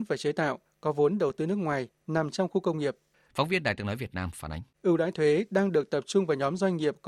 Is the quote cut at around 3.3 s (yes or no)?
yes